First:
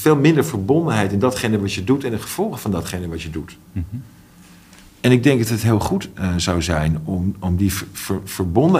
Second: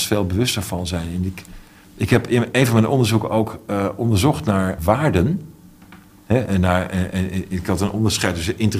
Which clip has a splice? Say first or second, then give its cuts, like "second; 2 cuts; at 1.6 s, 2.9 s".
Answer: second; 1 cut; at 4.8 s